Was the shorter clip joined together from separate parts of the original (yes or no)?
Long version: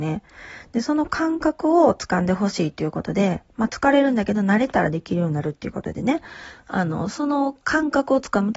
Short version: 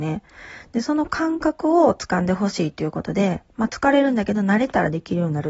no